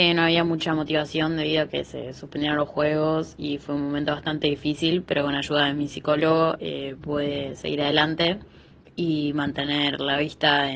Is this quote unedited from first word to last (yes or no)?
yes